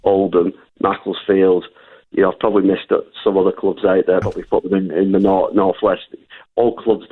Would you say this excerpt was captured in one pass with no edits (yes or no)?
no